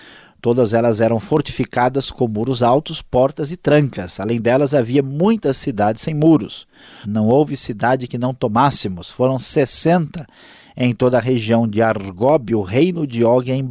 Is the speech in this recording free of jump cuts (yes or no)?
no